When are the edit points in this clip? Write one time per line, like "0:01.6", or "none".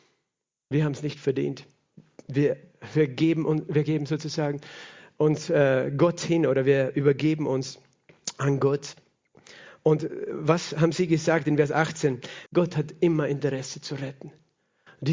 0:12.5